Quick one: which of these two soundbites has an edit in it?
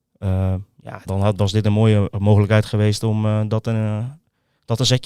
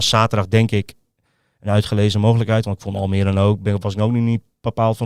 first; 1 cut; at 1.1 s

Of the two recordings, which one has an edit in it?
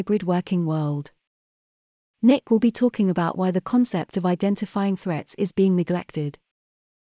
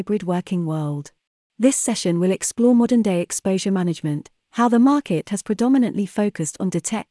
second; 1 cut; at 1.5 s

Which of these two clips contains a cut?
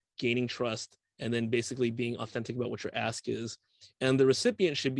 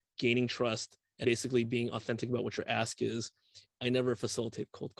second; 2 cuts; at 1.2 s, 3.7 s

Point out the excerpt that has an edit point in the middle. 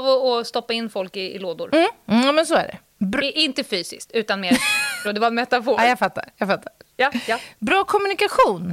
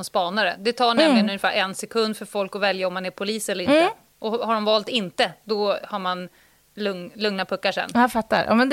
first; 1 cut; at 5.0 s

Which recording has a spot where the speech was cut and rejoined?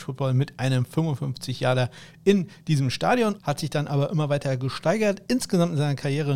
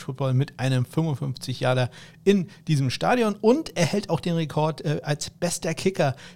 first; 1 cut; at 3.4 s

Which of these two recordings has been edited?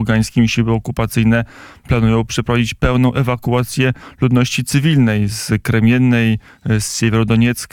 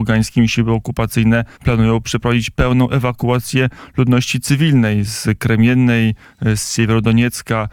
second; 1 cut; at 1.5 s

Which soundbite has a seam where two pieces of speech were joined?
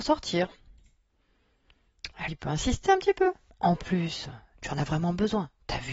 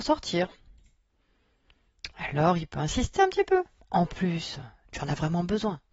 first; 1 cut; at 2.3 s

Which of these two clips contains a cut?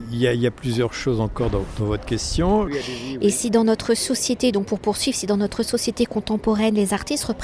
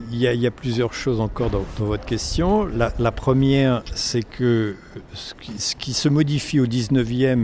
first; 1 cut; at 2.7 s

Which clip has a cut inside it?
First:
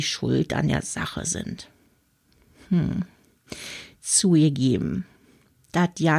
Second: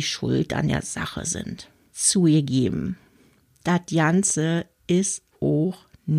second; 1 cut; at 1.9 s

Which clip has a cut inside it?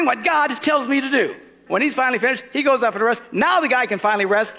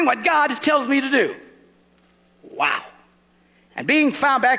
first; 1 cut; at 1.7 s

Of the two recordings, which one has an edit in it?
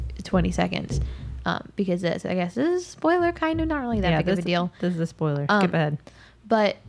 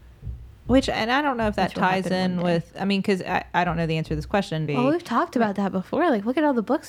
second; 1 cut; at 4.7 s

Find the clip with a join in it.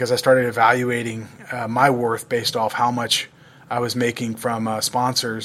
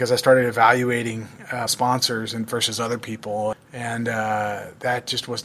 second; 2 cuts; at 1.7 s, 3.5 s

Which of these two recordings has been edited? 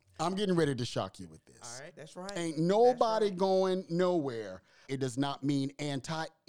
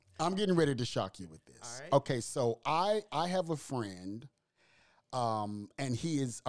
first; 2 cuts; at 1.9 s, 4.9 s

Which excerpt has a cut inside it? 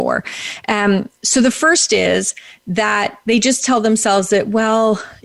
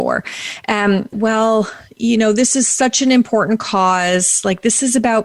second; 1 cut; at 1.1 s

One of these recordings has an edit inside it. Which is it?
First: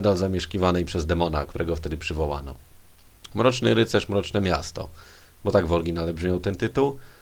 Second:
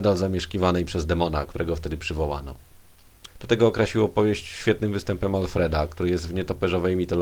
second; 1 cut; at 3.3 s

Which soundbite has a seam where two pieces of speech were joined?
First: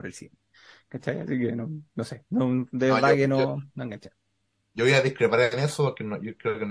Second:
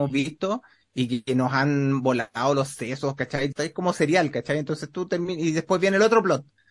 second; 1 cut; at 3.5 s

